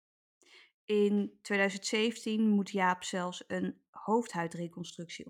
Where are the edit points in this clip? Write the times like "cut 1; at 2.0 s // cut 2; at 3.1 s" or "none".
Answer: none